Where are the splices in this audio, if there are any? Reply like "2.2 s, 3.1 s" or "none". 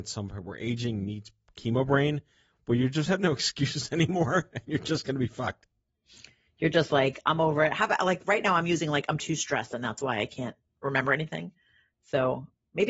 none